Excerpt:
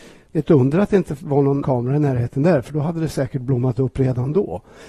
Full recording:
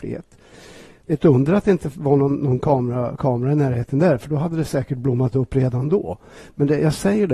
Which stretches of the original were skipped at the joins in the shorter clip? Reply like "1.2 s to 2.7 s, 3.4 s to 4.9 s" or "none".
2.4 s to 3.2 s